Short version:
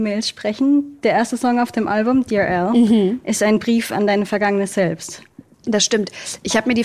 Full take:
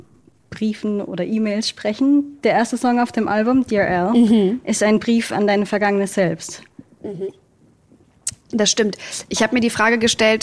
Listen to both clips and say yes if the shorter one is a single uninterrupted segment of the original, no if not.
no